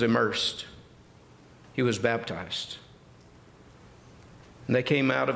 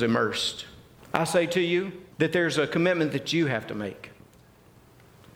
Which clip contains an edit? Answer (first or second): second